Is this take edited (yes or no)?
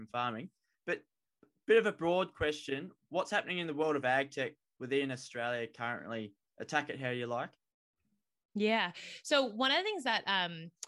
no